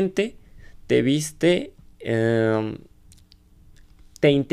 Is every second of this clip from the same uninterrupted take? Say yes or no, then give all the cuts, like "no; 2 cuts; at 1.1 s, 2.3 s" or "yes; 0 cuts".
yes; 0 cuts